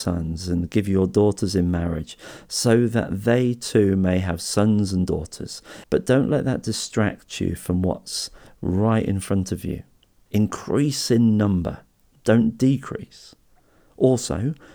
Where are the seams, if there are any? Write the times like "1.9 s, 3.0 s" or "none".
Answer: 5.8 s, 10.3 s